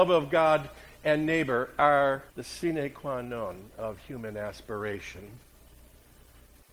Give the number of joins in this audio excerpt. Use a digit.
1